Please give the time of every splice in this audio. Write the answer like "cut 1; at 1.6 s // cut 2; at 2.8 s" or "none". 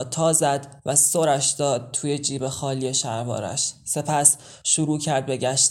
none